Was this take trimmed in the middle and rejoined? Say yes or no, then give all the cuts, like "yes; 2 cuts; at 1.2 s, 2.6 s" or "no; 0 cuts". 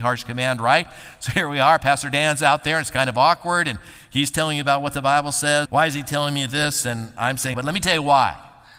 yes; 2 cuts; at 5.7 s, 7.5 s